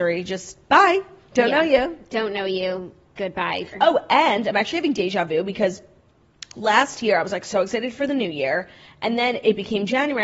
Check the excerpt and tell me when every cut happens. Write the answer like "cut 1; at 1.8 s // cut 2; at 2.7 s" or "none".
cut 1; at 3.7 s